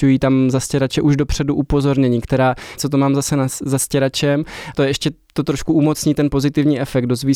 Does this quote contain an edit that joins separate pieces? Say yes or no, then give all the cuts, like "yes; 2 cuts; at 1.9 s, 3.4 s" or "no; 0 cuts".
yes; 2 cuts; at 2.8 s, 4.7 s